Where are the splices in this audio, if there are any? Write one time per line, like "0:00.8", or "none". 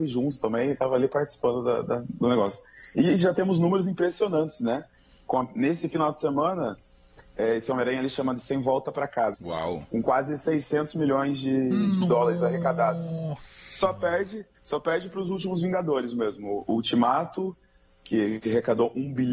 0:09.3
0:14.5